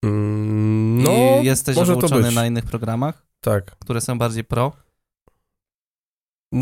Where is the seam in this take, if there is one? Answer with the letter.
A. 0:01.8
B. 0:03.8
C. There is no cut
A